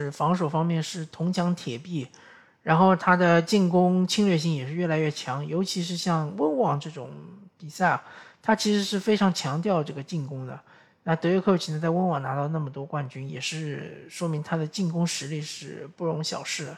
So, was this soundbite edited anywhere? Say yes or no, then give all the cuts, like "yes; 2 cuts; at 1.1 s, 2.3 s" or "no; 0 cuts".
no; 0 cuts